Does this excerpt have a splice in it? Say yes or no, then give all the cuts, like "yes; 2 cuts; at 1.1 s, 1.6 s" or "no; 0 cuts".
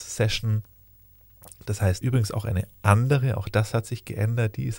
yes; 1 cut; at 2.0 s